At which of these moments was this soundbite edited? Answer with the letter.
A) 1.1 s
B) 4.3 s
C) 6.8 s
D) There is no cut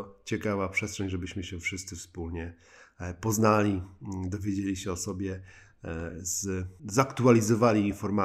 C